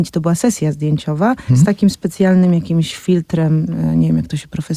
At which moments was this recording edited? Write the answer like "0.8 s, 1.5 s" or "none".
1.5 s